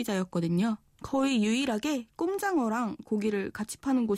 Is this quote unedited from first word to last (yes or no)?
no